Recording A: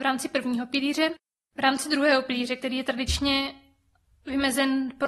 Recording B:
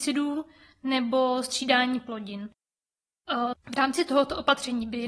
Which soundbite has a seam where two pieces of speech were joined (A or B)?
B